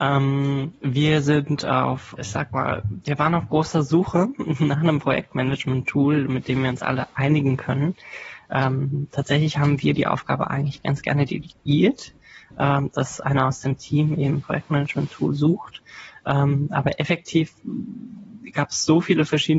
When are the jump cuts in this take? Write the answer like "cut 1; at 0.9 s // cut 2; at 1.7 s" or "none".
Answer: cut 1; at 2.2 s